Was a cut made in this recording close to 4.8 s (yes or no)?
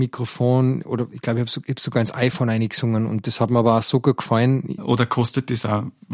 yes